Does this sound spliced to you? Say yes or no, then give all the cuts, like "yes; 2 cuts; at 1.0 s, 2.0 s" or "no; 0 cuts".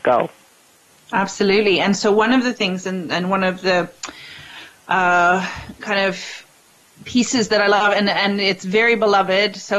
no; 0 cuts